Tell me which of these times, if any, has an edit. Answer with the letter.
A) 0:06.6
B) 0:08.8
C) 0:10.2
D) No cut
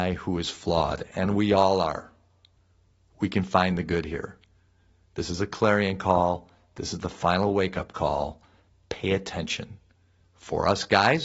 C